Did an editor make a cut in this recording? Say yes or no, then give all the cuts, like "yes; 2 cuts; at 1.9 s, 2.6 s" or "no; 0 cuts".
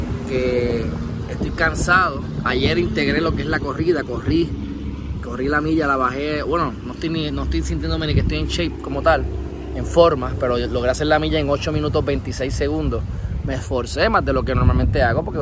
no; 0 cuts